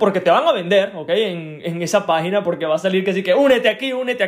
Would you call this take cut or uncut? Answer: uncut